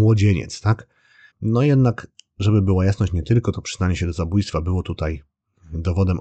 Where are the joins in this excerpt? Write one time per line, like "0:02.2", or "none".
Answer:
0:01.3